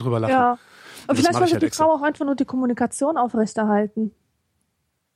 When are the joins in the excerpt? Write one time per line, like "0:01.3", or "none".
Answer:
none